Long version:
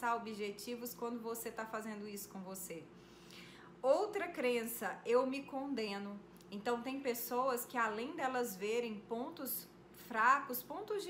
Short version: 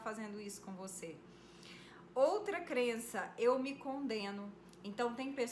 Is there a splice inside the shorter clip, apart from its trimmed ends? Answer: no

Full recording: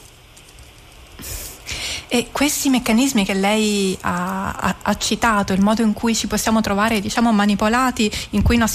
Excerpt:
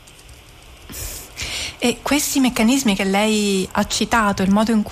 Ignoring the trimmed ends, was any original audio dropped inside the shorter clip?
yes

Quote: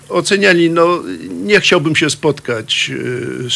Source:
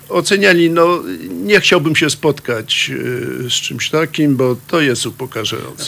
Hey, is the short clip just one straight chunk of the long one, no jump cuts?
yes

